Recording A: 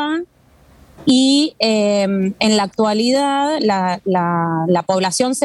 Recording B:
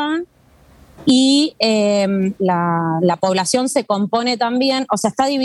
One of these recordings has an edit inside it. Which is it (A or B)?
B